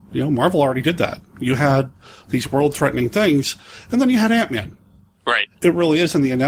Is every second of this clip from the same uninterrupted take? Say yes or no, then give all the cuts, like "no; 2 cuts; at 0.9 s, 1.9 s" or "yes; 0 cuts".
no; 1 cut; at 5.6 s